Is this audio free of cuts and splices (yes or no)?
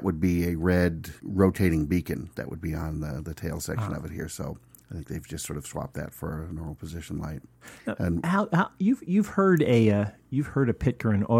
no